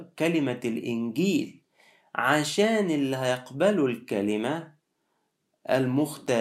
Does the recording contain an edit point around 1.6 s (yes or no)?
no